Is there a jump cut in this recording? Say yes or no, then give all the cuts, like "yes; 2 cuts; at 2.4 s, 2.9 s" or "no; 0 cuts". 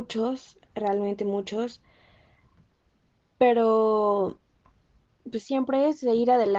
no; 0 cuts